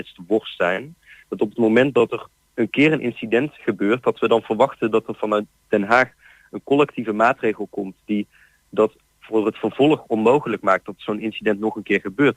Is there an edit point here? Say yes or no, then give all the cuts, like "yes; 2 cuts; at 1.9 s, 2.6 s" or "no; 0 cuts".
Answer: no; 0 cuts